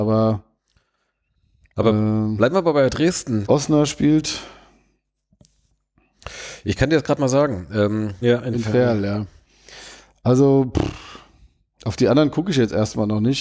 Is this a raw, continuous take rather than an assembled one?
no; 2 cuts; at 3.4 s, 8.2 s

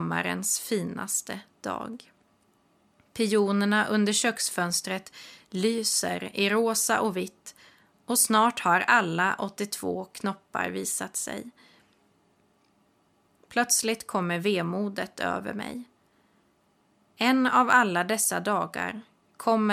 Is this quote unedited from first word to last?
yes; 0 cuts

